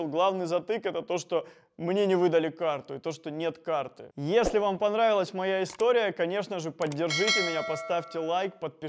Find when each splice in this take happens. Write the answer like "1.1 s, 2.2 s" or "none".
4.1 s